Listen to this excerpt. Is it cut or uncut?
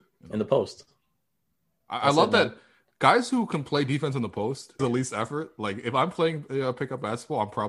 cut